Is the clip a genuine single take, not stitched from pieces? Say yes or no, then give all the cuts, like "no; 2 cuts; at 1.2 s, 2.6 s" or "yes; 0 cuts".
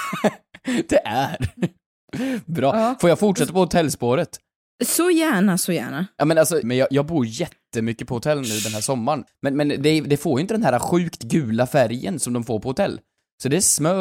no; 2 cuts; at 6.6 s, 9.3 s